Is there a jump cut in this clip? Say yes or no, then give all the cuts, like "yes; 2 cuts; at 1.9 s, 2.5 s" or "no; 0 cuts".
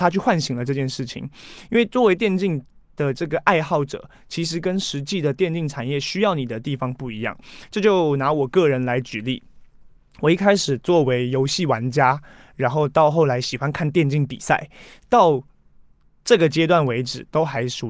no; 0 cuts